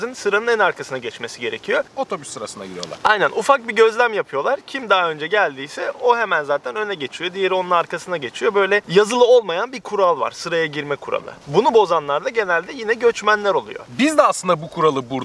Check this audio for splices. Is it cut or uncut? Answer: cut